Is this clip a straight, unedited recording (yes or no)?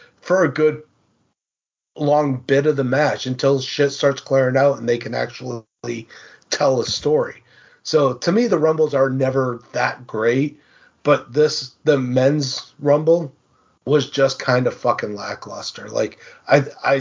yes